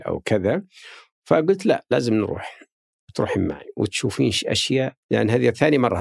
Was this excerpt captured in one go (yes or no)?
no